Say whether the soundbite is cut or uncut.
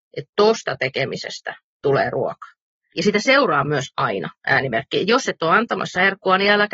cut